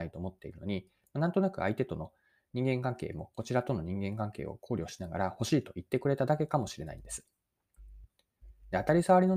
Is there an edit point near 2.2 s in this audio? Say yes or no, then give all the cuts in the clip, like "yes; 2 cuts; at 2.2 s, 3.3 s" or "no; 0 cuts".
no; 0 cuts